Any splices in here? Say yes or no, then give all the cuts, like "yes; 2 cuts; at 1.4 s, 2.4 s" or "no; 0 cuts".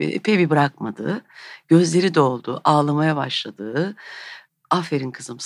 no; 0 cuts